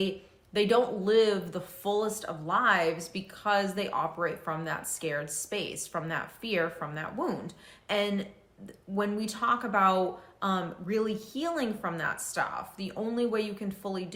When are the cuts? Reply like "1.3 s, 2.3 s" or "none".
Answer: none